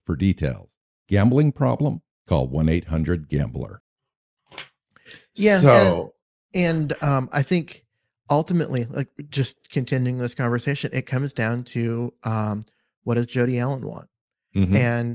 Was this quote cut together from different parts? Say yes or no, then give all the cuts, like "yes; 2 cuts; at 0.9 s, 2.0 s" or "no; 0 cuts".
no; 0 cuts